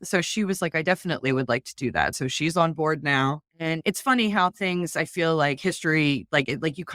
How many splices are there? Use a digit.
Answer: 0